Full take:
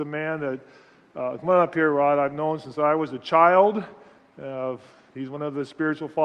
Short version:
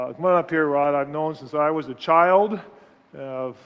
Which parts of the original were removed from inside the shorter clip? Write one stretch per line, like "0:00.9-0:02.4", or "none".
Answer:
none